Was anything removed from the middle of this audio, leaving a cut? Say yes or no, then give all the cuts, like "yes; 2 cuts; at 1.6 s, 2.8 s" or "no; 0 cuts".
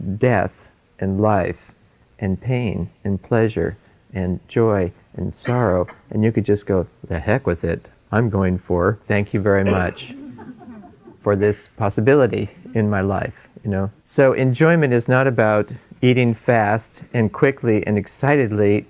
yes; 2 cuts; at 9.0 s, 14.0 s